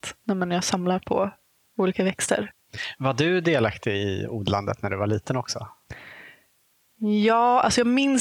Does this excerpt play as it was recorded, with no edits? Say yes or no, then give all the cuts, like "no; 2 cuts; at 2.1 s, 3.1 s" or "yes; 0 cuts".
yes; 0 cuts